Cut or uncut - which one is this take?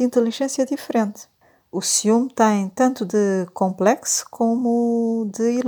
uncut